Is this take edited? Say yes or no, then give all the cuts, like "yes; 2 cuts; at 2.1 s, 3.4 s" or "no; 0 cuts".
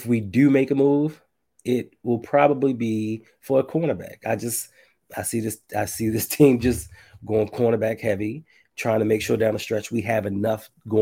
no; 0 cuts